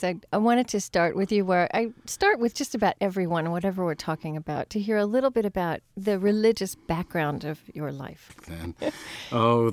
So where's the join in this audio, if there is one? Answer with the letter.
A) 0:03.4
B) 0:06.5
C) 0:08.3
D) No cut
C